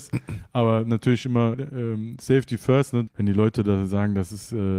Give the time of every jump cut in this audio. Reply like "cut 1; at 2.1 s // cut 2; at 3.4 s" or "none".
cut 1; at 1.5 s // cut 2; at 3.1 s